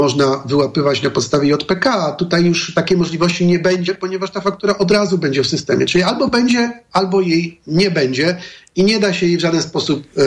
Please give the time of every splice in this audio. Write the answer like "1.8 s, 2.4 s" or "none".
none